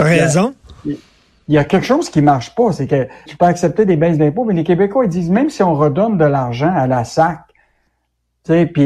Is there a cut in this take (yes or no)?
yes